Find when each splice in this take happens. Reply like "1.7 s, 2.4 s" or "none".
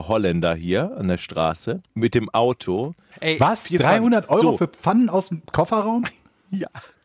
1.9 s, 3.1 s